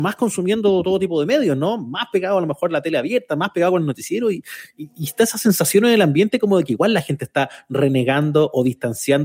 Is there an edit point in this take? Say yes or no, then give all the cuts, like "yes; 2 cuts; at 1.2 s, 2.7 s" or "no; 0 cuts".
no; 0 cuts